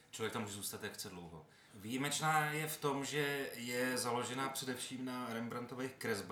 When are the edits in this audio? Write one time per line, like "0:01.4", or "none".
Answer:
0:01.7